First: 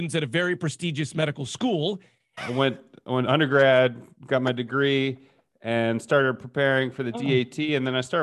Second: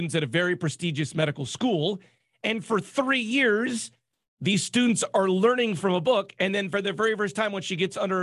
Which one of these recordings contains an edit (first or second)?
first